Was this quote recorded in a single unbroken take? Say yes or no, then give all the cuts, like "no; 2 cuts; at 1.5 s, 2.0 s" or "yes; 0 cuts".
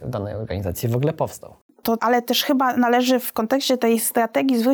no; 1 cut; at 2.0 s